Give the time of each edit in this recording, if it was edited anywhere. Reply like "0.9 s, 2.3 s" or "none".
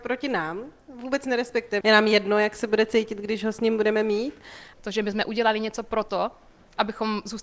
1.8 s, 4.7 s

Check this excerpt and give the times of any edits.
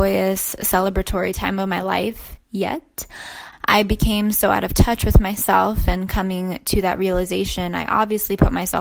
3.5 s

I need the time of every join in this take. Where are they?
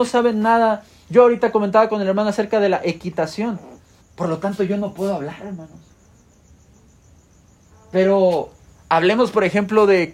4.0 s

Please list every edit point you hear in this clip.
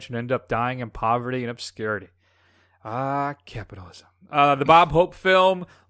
none

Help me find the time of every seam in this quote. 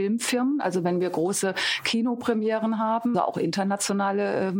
3.1 s

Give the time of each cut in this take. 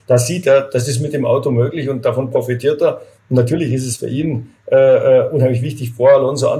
none

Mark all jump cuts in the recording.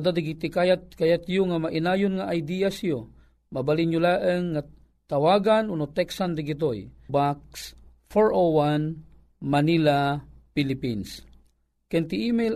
7.1 s

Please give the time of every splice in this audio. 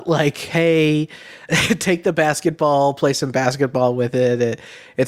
1.5 s

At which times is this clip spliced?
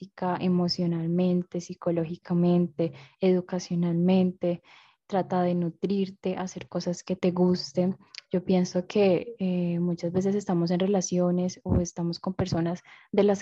none

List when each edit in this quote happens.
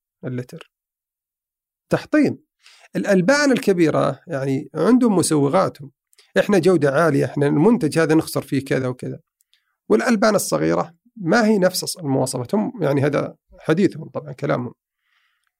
8.8 s

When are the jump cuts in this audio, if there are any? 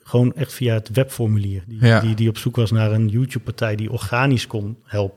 none

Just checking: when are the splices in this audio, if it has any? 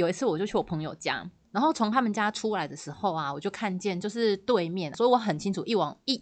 4.9 s

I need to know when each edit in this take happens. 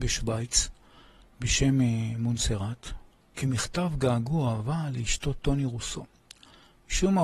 3.3 s

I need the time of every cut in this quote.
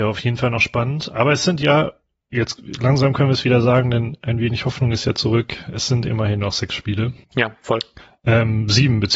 7.2 s

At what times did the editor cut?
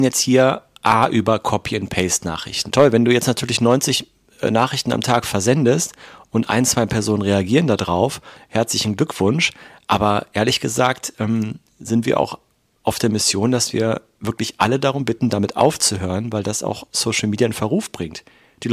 2.7 s

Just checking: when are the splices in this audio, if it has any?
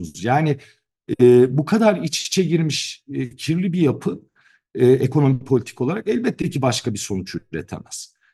none

